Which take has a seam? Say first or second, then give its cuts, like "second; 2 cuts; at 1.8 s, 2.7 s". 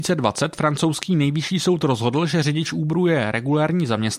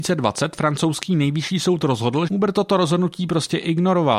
second; 1 cut; at 2.3 s